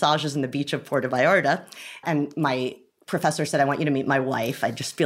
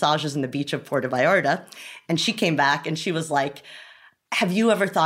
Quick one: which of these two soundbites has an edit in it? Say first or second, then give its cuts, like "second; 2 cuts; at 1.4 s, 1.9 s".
first; 1 cut; at 2.0 s